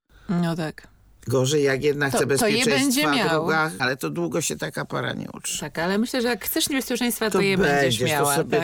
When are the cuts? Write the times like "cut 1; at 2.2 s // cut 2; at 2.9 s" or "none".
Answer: cut 1; at 3.8 s